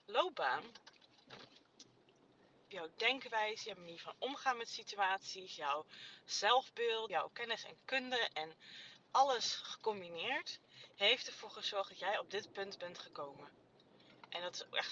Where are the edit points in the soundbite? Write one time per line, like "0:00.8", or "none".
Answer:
0:02.7
0:07.1